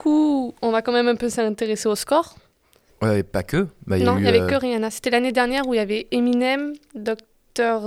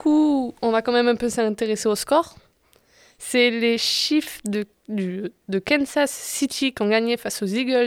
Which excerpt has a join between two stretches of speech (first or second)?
first